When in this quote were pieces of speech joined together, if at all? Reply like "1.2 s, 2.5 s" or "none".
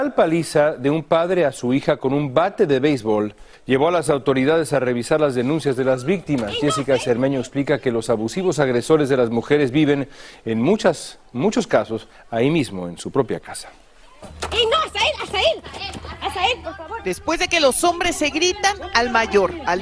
3.5 s